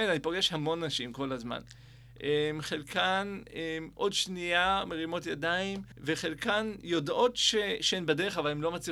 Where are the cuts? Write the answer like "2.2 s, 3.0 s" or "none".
5.9 s